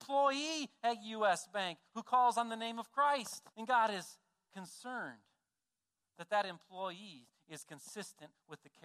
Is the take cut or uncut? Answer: cut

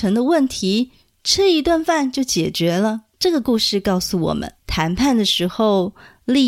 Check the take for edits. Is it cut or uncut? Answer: cut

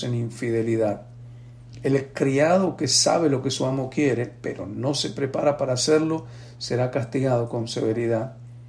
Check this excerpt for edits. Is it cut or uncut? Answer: uncut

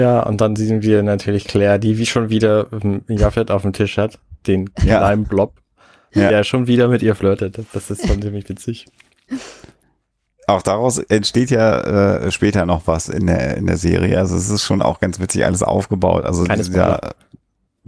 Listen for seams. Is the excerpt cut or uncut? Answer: uncut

